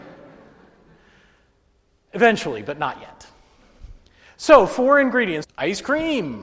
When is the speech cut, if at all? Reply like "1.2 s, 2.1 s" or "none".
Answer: 5.4 s